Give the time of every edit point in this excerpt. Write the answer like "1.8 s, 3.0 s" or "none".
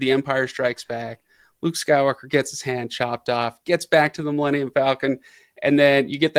none